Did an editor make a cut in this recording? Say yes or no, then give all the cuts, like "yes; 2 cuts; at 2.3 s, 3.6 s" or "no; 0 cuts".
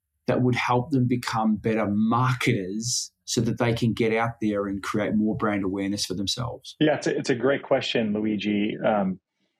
yes; 1 cut; at 3.2 s